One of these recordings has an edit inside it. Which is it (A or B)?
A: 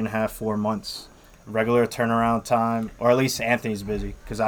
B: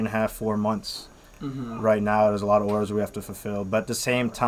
A